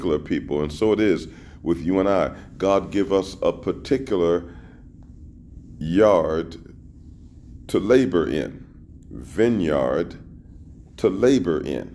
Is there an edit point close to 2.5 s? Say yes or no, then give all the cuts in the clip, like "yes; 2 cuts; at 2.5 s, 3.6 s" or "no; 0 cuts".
no; 0 cuts